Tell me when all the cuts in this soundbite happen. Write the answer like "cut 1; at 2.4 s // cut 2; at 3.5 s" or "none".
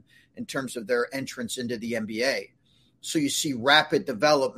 none

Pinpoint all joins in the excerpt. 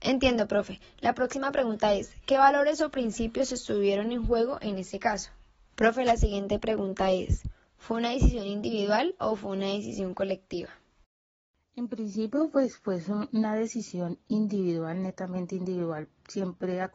cut 1; at 5.7 s

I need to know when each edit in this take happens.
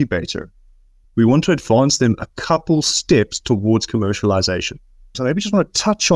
cut 1; at 1.0 s // cut 2; at 5.1 s

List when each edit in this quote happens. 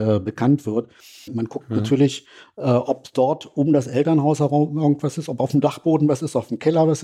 cut 1; at 1.3 s

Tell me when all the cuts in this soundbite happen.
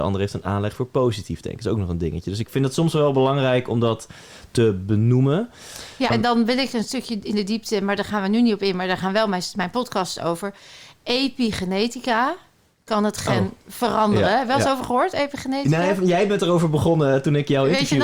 cut 1; at 6.1 s

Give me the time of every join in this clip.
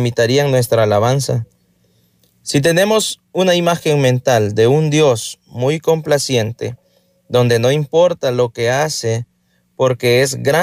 none

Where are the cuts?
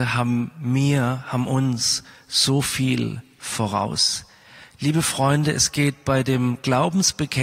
cut 1; at 4.8 s

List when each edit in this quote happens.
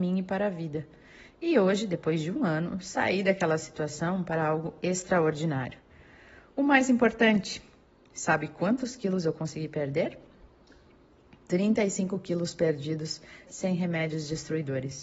cut 1; at 13.5 s

